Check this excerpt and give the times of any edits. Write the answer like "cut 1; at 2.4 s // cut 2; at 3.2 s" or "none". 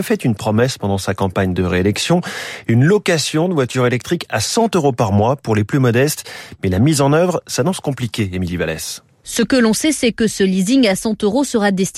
none

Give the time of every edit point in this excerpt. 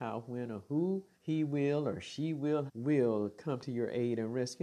cut 1; at 1.1 s // cut 2; at 2.7 s

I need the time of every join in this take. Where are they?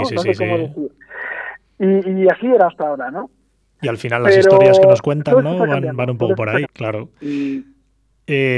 cut 1; at 6.6 s

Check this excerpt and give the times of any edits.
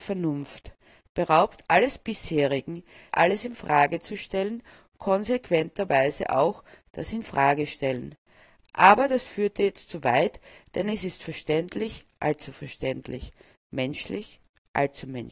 cut 1; at 3.1 s

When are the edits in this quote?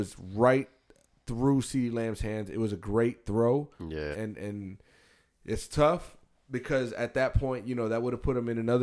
cut 1; at 4.1 s

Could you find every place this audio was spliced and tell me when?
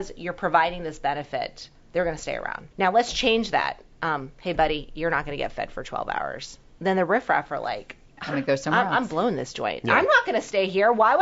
cut 1; at 2.7 s

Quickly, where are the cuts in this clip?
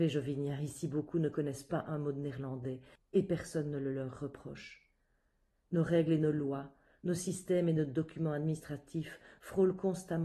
none

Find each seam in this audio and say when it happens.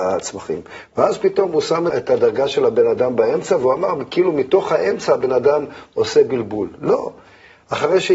cut 1; at 1.9 s

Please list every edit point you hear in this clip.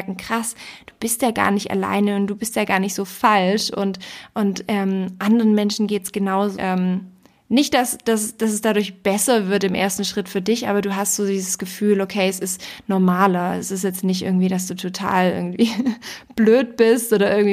cut 1; at 6.6 s

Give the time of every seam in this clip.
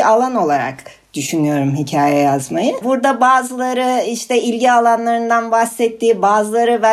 cut 1; at 2.8 s

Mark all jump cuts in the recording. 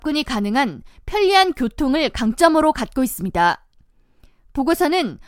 none

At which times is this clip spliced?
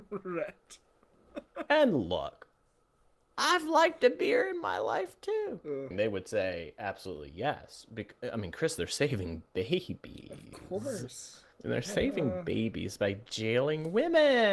cut 1; at 5.9 s // cut 2; at 11.5 s

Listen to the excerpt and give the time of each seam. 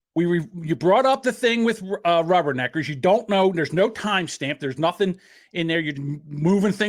cut 1; at 5.9 s

